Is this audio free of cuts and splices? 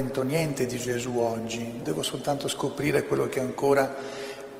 no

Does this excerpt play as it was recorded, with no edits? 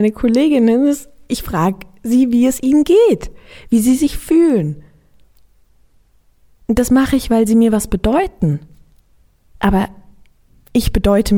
yes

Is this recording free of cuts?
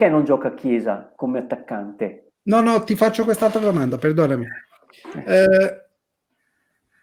no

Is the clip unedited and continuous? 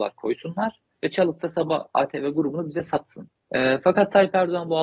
no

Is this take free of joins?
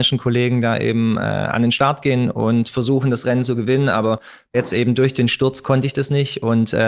yes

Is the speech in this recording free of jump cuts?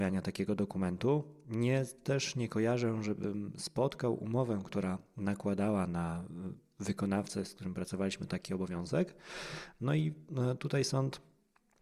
yes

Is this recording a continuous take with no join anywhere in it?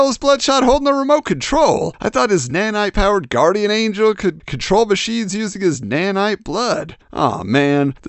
yes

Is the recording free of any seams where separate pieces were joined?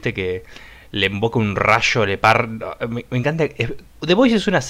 yes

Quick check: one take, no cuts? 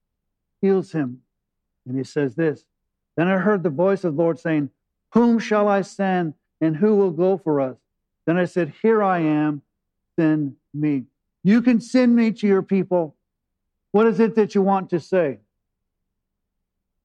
no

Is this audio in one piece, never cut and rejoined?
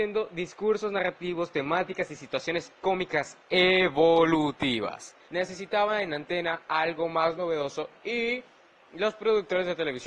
no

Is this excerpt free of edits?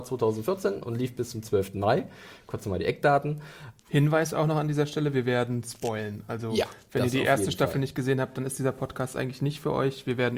no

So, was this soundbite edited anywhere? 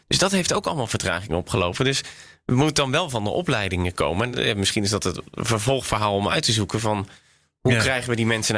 no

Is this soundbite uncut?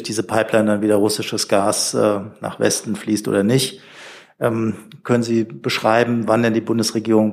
yes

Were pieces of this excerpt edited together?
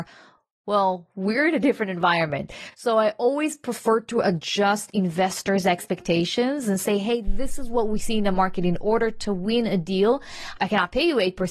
no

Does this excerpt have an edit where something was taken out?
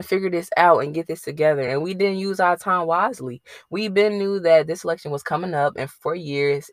no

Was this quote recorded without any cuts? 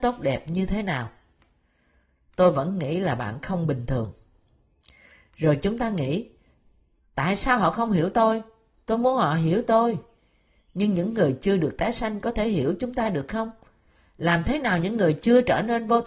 yes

